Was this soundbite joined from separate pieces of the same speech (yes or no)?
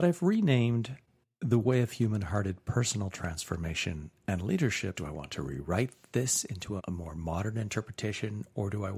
yes